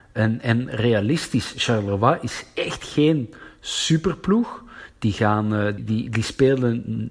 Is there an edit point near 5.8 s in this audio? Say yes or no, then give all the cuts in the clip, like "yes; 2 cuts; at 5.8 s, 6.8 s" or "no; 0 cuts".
yes; 1 cut; at 5.8 s